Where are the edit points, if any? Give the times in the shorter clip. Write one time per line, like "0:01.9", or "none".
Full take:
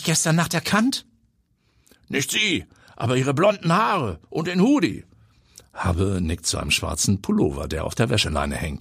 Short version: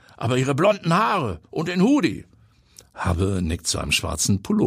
none